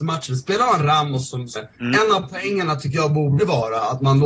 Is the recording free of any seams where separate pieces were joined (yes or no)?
no